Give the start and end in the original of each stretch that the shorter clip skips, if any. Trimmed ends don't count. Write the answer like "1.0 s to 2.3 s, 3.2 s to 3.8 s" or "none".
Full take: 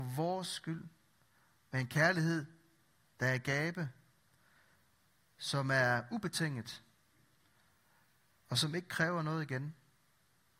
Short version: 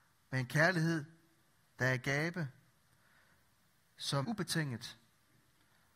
5.6 s to 6.1 s